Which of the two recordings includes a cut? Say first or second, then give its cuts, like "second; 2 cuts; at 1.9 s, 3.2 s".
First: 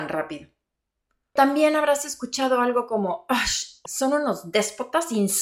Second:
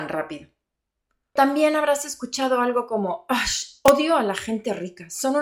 first; 1 cut; at 3.9 s